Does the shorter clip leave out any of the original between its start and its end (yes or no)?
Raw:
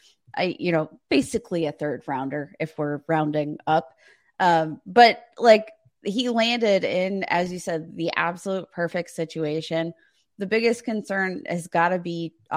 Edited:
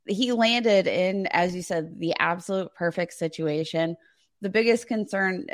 no